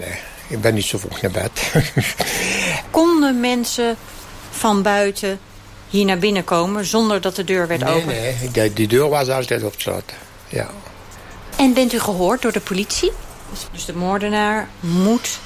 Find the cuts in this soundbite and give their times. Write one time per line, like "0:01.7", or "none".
0:11.5
0:13.7